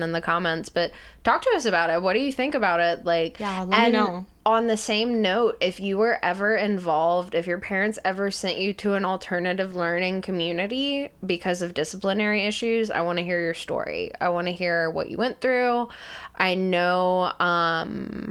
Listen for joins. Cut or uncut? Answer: uncut